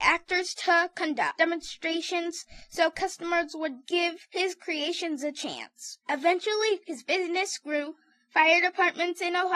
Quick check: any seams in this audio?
no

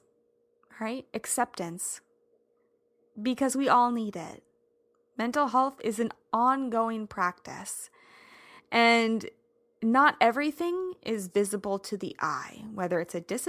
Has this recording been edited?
no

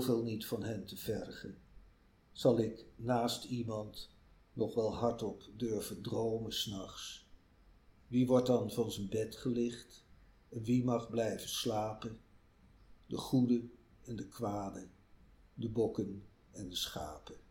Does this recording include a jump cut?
no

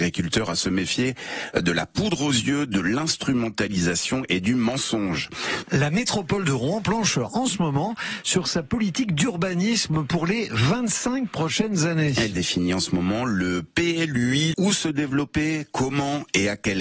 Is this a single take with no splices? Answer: no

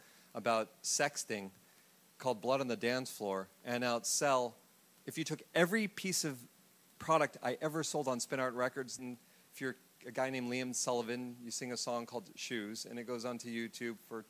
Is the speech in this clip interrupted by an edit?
yes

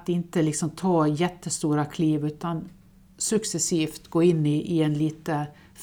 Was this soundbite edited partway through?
no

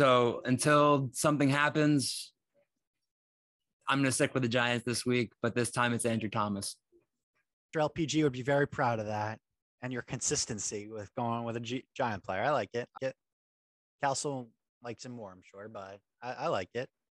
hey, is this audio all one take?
no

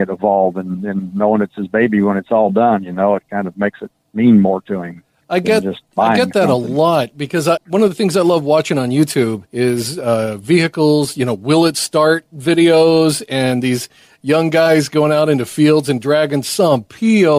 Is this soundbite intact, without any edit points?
no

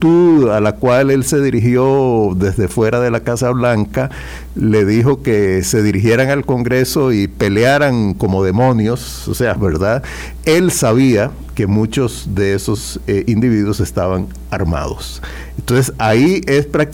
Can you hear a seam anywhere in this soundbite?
yes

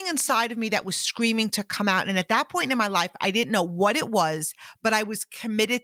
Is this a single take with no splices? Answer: yes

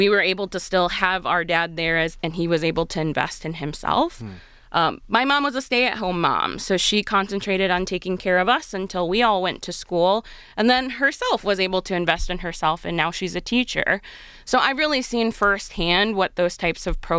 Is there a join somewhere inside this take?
no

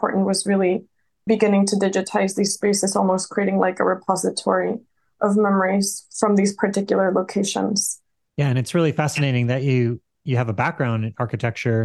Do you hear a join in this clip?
yes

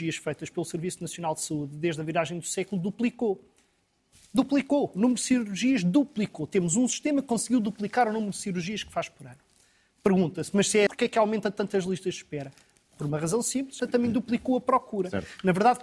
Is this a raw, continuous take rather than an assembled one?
no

